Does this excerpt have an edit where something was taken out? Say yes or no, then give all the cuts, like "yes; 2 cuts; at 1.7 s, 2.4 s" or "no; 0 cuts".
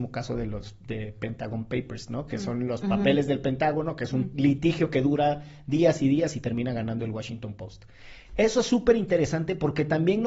no; 0 cuts